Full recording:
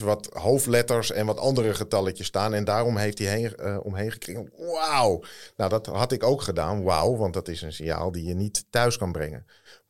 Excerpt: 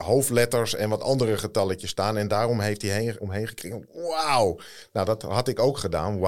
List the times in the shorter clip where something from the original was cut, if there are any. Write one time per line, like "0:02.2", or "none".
0:03.2